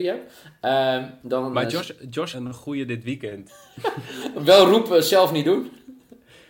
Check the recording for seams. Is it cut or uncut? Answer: cut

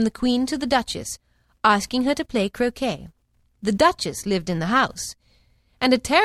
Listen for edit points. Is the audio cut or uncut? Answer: uncut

